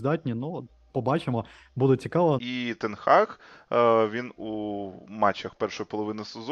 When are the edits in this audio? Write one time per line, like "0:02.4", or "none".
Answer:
0:02.4